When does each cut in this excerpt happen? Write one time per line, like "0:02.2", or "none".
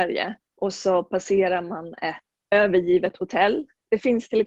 0:02.5